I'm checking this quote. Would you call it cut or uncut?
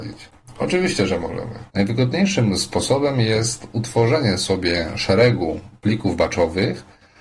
cut